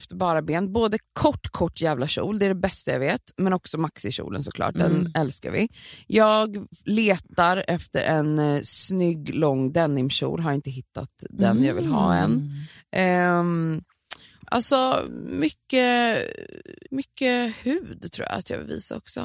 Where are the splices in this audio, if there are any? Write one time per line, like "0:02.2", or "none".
0:14.4
0:16.9